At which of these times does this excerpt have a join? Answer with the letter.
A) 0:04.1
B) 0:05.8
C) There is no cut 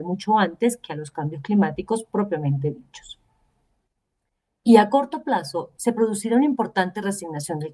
B